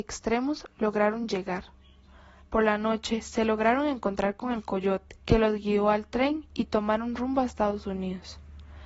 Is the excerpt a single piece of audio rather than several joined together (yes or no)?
no